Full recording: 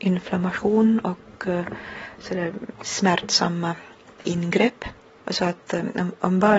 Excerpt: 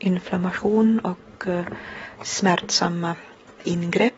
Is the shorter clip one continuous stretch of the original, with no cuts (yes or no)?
no